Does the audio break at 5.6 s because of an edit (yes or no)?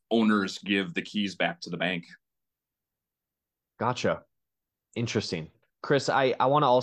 yes